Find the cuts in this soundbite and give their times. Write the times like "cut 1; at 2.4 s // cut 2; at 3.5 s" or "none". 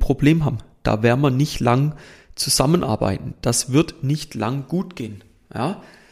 none